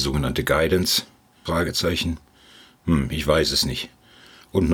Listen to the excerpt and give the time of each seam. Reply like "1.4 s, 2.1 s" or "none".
1.5 s